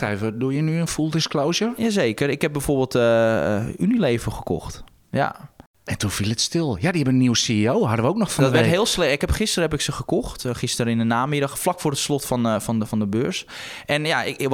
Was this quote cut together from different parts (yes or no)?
no